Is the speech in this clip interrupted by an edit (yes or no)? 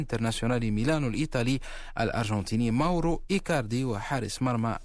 no